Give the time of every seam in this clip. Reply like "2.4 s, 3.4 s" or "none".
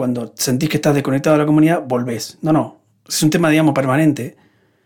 none

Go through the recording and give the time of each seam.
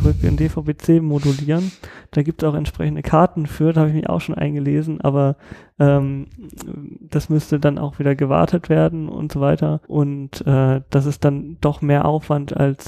9.8 s

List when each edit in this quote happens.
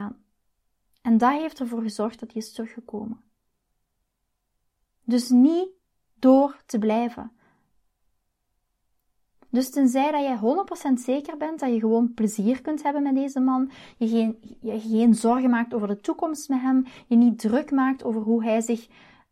none

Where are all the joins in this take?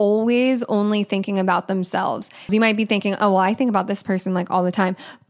2.5 s

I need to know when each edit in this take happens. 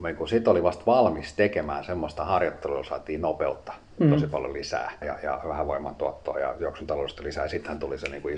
5.0 s

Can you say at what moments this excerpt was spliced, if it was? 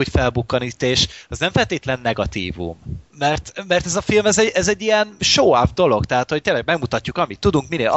3.1 s

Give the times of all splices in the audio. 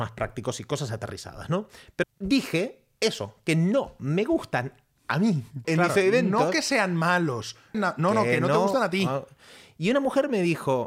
2.0 s, 5.6 s, 7.7 s

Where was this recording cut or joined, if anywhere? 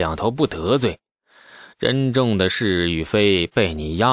none

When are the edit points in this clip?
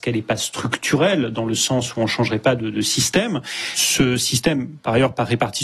none

